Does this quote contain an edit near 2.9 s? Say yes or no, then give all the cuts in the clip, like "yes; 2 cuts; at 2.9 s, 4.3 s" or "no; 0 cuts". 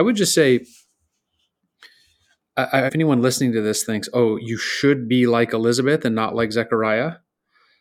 yes; 1 cut; at 2.9 s